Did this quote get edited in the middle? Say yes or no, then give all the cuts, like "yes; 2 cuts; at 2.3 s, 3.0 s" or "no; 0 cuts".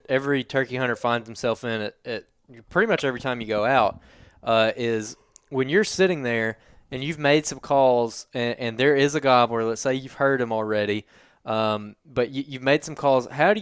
no; 0 cuts